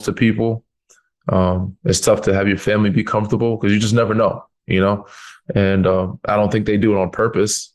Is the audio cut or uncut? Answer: uncut